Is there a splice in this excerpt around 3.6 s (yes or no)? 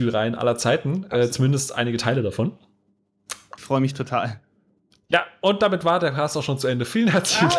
yes